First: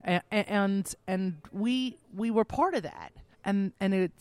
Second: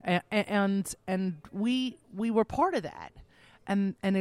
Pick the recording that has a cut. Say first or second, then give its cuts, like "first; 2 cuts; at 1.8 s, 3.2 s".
first; 1 cut; at 3.3 s